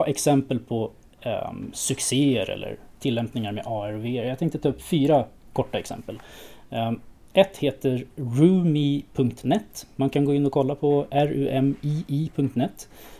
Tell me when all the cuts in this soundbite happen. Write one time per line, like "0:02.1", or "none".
none

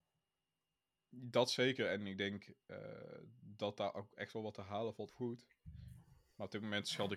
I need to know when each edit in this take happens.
0:05.1

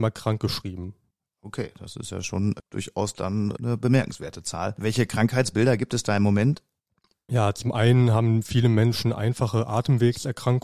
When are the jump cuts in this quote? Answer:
none

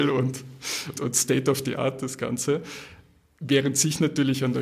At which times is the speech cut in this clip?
0:01.0

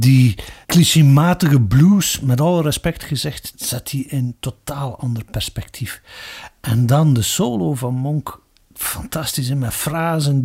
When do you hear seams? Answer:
0:03.5

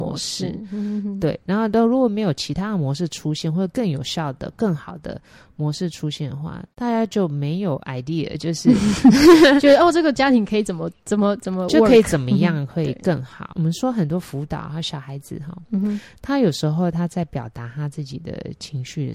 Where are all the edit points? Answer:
none

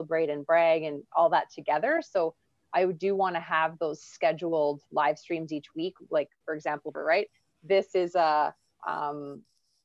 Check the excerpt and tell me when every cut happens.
0:06.9
0:08.8

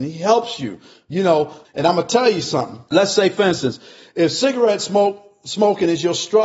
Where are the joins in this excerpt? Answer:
0:01.6
0:02.9

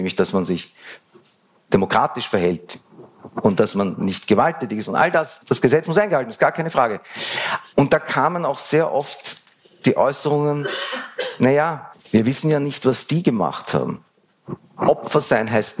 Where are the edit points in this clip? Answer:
0:07.7
0:12.0
0:14.6

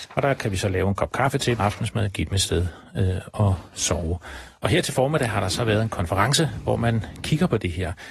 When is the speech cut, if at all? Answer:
0:01.6

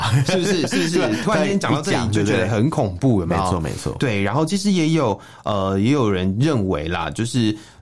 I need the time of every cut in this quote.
none

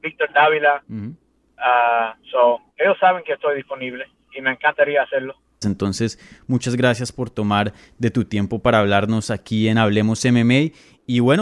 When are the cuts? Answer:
0:02.7
0:05.6

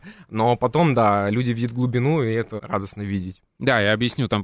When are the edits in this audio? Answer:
0:02.6

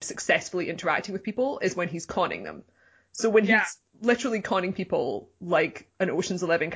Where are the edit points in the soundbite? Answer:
none

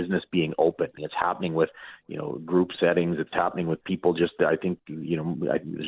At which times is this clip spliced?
0:01.0

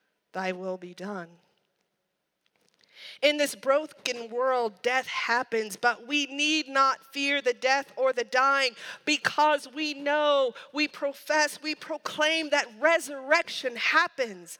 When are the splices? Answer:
none

